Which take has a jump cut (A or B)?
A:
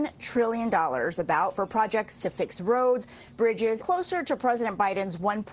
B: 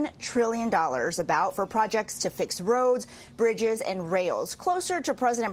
A